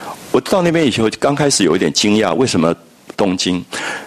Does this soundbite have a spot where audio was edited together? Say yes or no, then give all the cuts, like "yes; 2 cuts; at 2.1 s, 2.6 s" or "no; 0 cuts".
yes; 1 cut; at 3.1 s